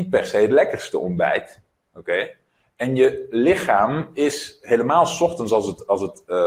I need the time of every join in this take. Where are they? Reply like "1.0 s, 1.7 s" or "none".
none